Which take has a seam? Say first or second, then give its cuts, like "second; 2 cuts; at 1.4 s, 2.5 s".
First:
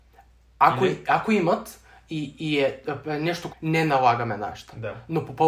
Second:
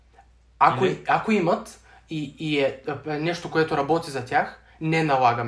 first; 1 cut; at 3.5 s